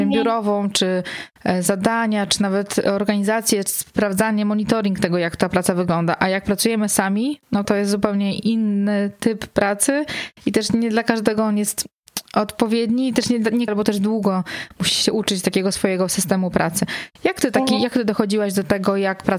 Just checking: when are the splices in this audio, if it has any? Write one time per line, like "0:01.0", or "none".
0:07.6
0:13.7